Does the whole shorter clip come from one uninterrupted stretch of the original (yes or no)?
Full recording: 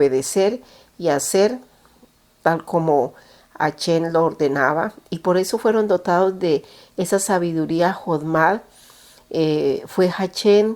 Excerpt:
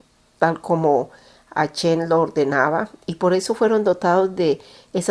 yes